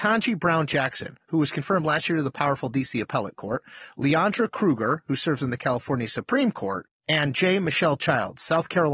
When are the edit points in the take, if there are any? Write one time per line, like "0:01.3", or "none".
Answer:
none